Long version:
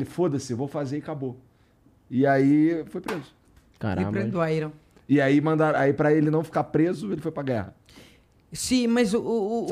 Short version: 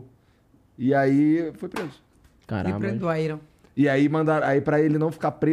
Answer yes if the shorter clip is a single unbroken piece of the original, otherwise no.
yes